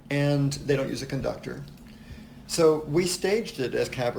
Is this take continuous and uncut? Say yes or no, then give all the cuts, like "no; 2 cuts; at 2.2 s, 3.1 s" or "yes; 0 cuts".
yes; 0 cuts